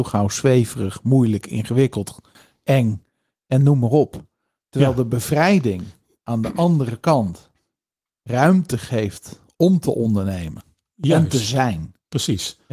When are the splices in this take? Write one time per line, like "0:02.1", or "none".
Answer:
none